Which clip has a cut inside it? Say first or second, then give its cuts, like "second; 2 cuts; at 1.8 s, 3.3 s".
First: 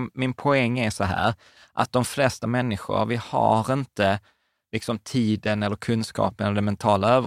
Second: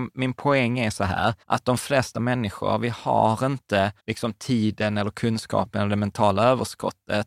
second; 2 cuts; at 1.4 s, 4.0 s